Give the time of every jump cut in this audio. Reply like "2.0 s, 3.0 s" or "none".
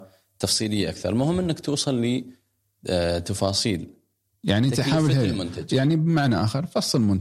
none